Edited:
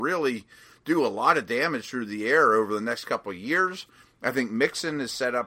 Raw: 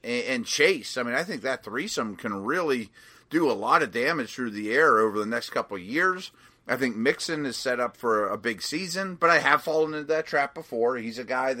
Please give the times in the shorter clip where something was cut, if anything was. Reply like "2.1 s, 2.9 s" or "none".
none